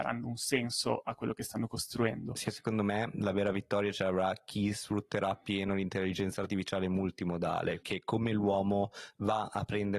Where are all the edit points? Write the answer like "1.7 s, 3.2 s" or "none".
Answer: 2.4 s, 7.8 s

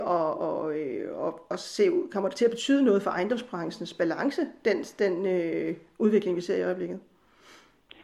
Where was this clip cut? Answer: none

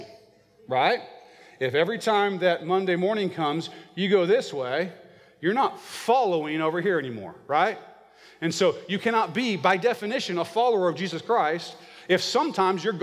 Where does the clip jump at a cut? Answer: none

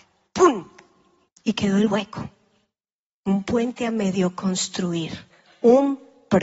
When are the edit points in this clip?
1.3 s

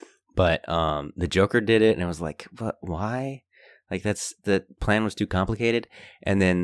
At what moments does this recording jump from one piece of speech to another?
none

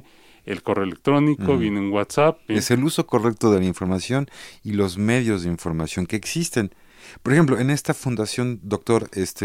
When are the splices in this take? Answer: 2.5 s

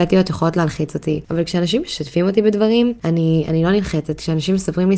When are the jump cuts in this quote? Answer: none

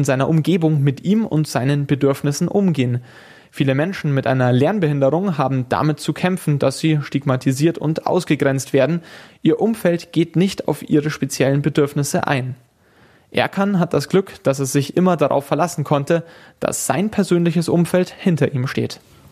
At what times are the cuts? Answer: none

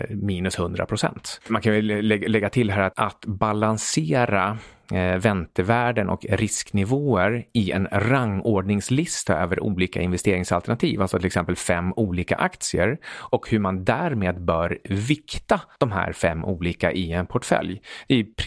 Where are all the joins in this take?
2.9 s

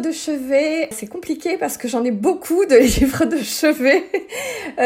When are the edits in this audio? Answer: 0.9 s

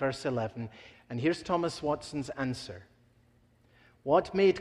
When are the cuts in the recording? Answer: 0.9 s

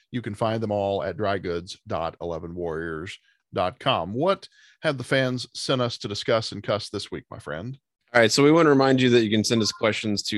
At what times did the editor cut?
none

